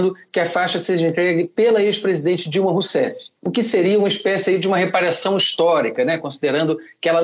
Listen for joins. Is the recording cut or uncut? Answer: cut